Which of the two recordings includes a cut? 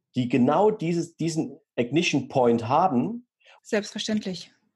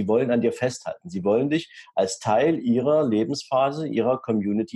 first; 1 cut; at 3.6 s

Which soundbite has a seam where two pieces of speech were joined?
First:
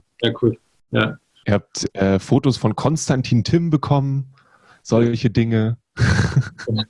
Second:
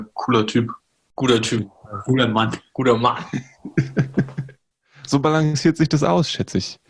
first; 1 cut; at 1.4 s

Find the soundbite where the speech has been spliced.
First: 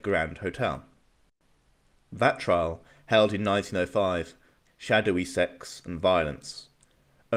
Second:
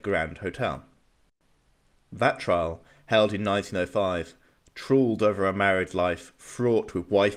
first; 1 cut; at 4.7 s

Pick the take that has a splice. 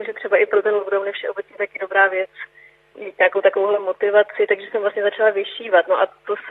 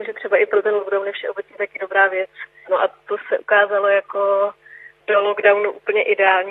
second; 1 cut; at 2.6 s

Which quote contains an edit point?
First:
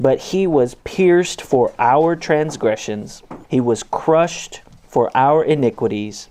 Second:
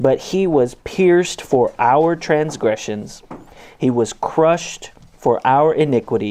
first; 1 cut; at 3.4 s

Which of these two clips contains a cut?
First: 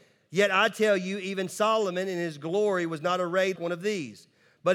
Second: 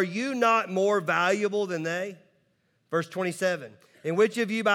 first; 1 cut; at 3.6 s

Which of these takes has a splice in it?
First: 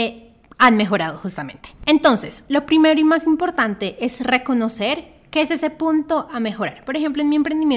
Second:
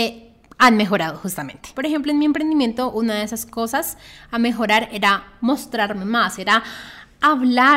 second; 2 cuts; at 1.7 s, 6.4 s

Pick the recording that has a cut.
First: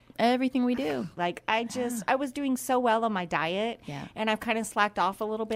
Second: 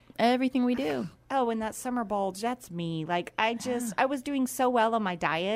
first; 1 cut; at 1.2 s

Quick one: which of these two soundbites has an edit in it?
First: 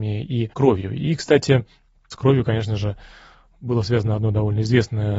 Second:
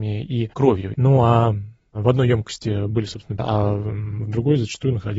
second; 2 cuts; at 0.9 s, 3.4 s

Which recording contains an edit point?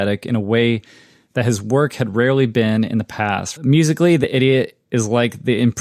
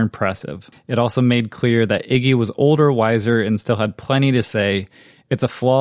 first; 1 cut; at 3.6 s

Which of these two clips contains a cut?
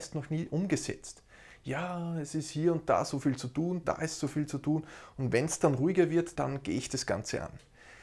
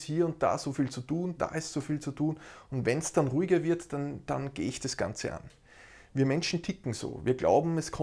first; 1 cut; at 6.3 s

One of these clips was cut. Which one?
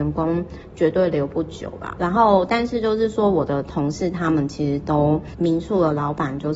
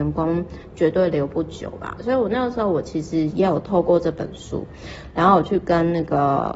first; 2 cuts; at 2.0 s, 5.3 s

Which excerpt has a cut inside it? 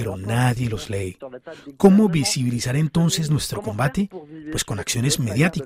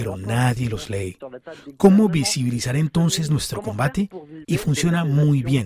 second; 1 cut; at 4.4 s

